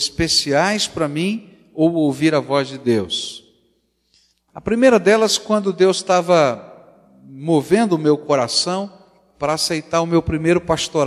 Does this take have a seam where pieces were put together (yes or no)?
no